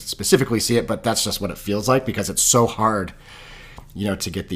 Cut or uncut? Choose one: uncut